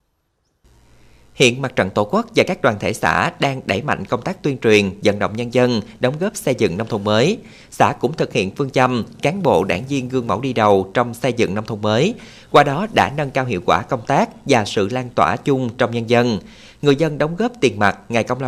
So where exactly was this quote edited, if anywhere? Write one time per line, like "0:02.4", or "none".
none